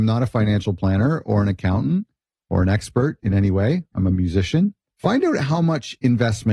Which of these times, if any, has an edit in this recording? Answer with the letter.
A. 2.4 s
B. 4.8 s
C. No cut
B